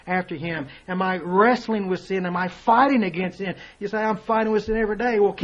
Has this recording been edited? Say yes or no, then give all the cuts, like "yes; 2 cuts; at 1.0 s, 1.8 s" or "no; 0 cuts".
no; 0 cuts